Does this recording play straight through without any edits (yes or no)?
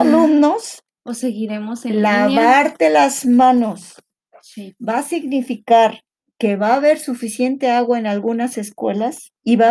no